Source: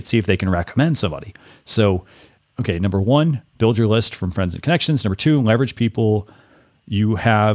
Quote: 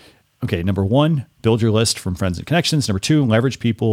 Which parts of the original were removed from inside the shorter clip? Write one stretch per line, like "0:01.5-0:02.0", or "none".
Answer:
none